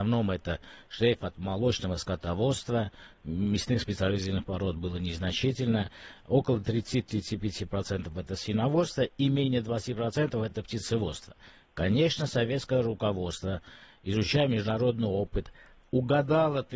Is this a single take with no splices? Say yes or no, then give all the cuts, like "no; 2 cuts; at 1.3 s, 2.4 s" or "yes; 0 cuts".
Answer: yes; 0 cuts